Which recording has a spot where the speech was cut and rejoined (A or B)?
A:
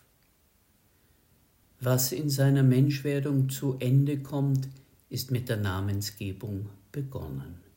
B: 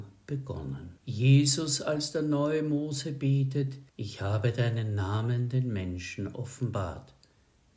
B